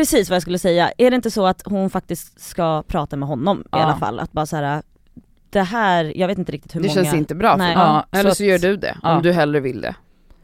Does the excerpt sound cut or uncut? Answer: cut